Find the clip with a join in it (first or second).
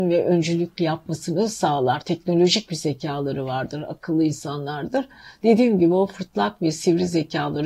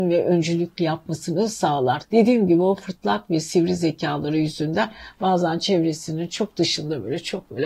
second